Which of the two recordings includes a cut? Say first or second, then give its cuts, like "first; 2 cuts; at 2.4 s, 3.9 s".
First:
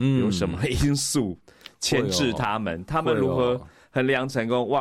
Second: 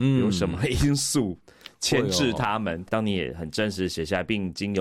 second; 1 cut; at 2.9 s